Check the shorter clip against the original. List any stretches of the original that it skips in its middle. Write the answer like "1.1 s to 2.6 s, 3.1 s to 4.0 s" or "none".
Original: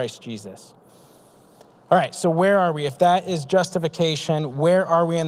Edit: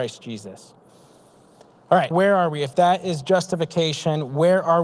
2.1 s to 2.3 s